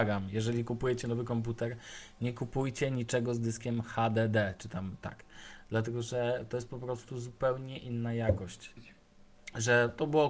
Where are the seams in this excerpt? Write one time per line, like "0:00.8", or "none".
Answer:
0:08.8